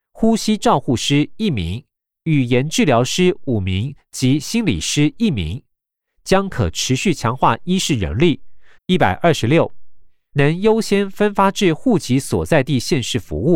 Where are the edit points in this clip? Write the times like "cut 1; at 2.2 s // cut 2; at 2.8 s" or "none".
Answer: cut 1; at 8.8 s // cut 2; at 10.3 s